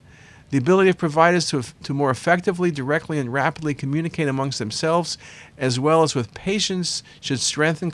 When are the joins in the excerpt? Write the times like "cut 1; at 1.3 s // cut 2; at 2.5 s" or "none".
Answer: none